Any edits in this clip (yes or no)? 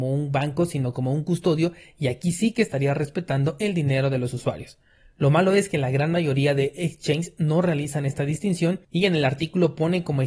yes